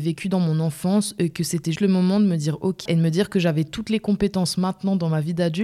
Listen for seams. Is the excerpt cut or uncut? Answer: cut